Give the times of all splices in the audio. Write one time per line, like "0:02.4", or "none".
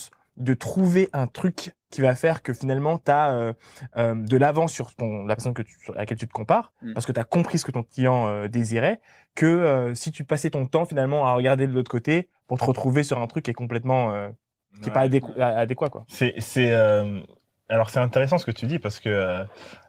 none